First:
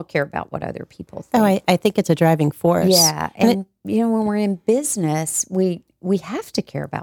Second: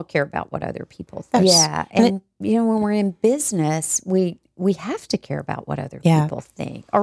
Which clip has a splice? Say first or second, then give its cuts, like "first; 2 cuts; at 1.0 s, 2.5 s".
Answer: second; 1 cut; at 1.4 s